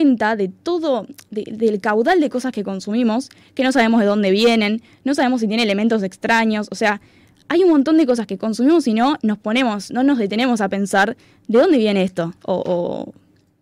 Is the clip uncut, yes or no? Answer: no